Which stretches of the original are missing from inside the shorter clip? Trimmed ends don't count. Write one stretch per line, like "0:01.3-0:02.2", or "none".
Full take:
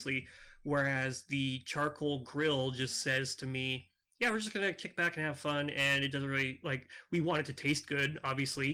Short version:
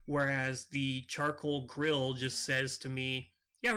none